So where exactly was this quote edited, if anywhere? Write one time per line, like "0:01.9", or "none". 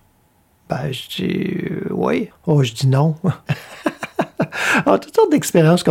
0:02.3
0:03.5